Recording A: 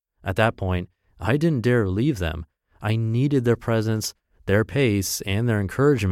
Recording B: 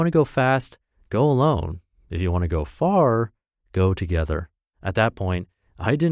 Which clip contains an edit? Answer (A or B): B